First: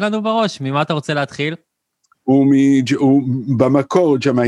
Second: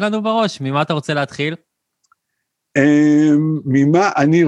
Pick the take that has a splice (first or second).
first